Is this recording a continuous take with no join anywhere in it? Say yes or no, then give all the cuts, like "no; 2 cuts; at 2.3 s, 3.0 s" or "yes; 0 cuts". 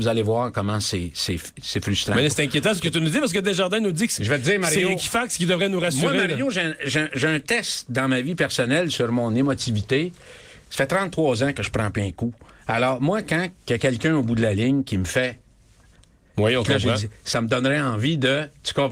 yes; 0 cuts